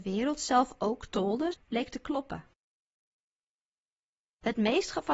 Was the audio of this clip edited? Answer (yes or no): yes